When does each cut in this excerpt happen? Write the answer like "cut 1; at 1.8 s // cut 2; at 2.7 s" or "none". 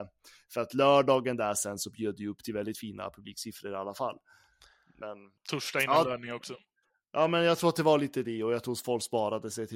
cut 1; at 5.4 s